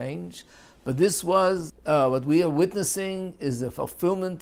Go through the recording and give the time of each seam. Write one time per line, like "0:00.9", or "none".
0:01.7